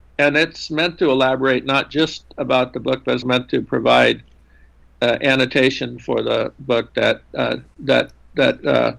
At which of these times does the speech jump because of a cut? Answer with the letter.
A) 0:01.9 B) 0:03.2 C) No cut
B